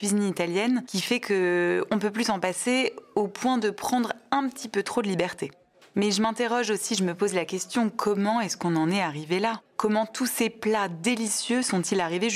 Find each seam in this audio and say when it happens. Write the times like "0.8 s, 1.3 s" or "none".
none